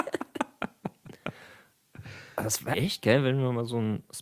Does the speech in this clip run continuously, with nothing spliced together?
no; 1 cut; at 2.7 s

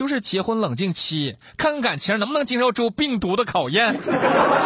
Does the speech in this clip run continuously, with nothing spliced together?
yes; 0 cuts

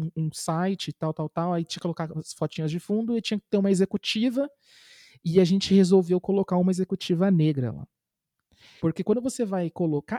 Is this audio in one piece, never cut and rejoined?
no; 1 cut; at 8.8 s

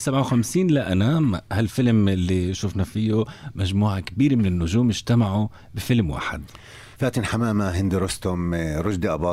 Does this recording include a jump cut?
no; 0 cuts

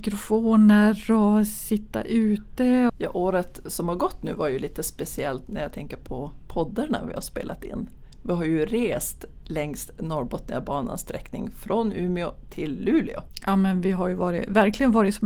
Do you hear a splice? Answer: yes; 1 cut; at 2.9 s

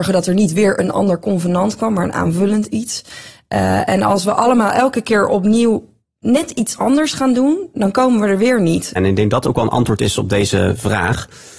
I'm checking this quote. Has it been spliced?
yes; 1 cut; at 9.0 s

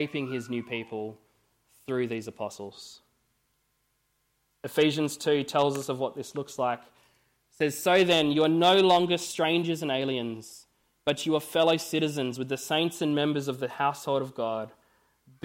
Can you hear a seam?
no; 0 cuts

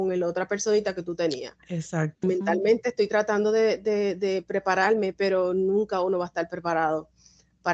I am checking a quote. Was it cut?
yes; 1 cut; at 2.2 s

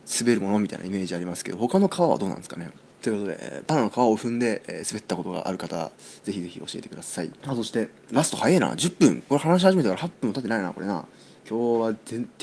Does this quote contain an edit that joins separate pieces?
no; 0 cuts

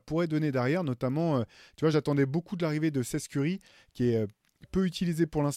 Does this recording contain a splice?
no; 0 cuts

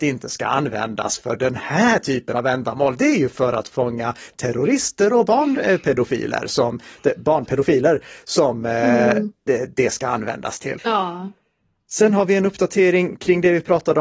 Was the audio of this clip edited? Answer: yes; 2 cuts; at 7.5 s, 10.8 s

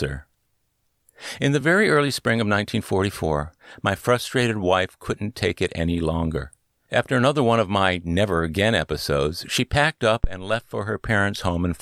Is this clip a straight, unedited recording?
yes; 0 cuts

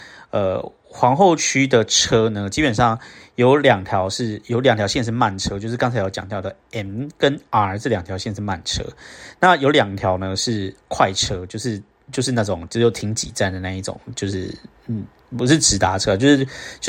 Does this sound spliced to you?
no; 0 cuts

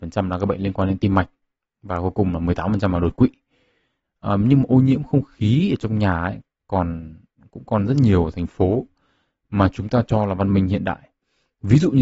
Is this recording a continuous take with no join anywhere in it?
no; 1 cut; at 4.0 s

